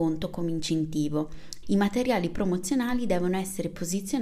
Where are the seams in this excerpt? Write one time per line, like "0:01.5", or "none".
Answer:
0:01.6